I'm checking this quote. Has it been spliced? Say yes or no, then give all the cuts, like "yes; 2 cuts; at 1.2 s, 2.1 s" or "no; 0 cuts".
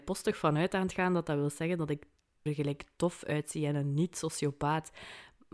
yes; 1 cut; at 2.5 s